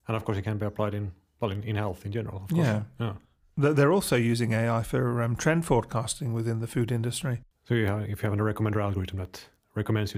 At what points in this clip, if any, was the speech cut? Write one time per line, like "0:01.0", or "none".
0:07.5